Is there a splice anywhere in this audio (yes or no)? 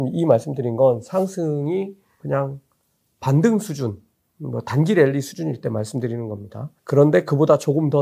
yes